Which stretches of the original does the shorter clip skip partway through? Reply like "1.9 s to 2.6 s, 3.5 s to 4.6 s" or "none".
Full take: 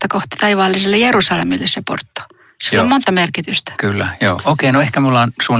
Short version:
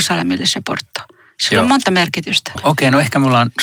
3.8 s to 4.4 s